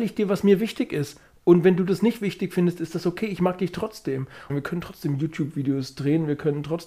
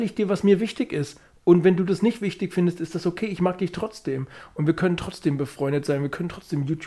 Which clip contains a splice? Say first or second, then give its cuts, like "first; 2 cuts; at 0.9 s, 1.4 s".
first; 1 cut; at 4.5 s